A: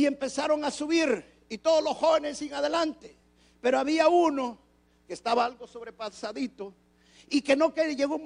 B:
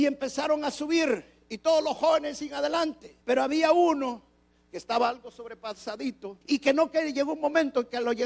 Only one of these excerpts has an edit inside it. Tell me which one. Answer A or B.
B